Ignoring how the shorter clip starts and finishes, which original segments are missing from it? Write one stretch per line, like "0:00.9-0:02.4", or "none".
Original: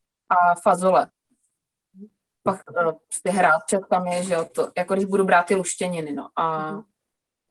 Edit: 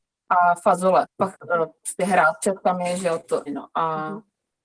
0:01.1-0:02.3
0:04.7-0:06.1

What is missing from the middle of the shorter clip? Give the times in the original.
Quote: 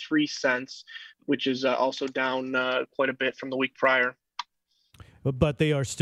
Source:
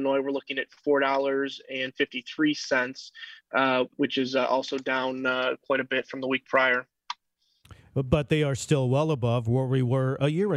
0:03.5-0:03.9

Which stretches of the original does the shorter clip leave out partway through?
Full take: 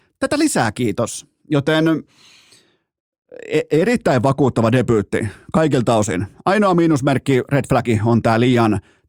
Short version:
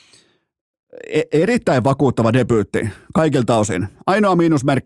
none

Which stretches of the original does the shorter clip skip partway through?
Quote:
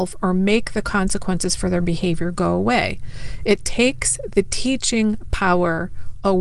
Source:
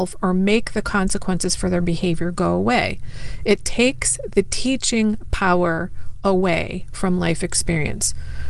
none

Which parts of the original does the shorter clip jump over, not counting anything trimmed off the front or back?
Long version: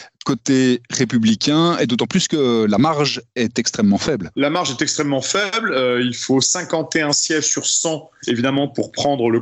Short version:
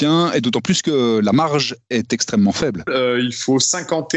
0:04.3-0:05.7

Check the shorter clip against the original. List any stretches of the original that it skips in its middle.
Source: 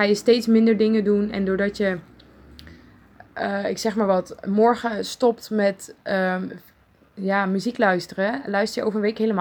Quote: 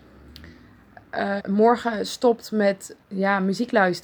0:03.6-0:04.4
0:06.0-0:07.1

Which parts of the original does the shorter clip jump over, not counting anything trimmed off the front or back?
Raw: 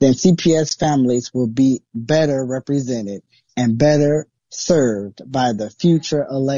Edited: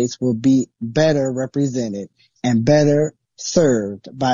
none

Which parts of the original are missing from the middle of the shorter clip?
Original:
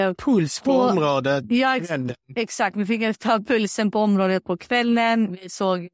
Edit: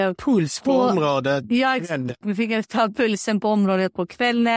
0:02.2-0:02.7

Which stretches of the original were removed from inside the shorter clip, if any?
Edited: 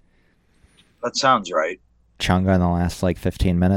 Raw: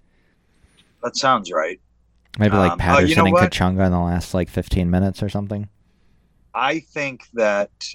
0:02.2-0:03.5

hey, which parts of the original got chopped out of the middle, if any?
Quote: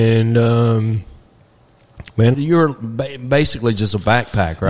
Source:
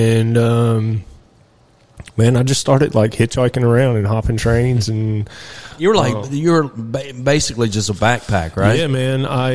0:02.3-0:06.3

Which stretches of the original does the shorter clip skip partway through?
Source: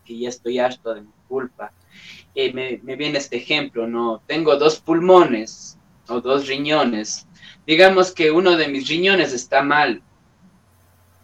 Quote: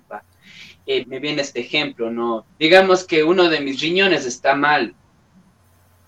0:02.5-0:02.8
0:04.3-0:07.6

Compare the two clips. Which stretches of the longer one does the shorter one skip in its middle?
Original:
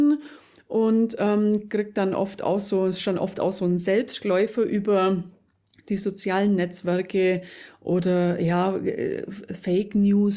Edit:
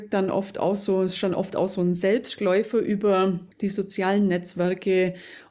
0:05.4-0:05.8

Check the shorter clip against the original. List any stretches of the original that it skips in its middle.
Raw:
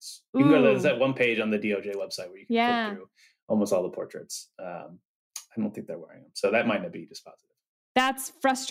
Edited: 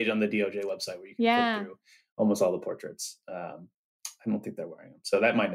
none

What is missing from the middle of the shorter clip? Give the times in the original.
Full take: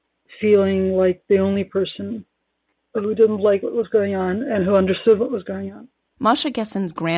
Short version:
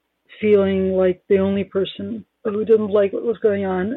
0:02.3-0:02.8

